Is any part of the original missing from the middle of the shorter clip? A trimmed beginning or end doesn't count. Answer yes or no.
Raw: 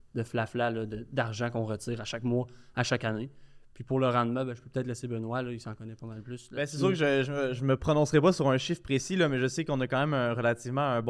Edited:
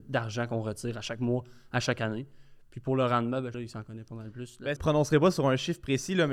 yes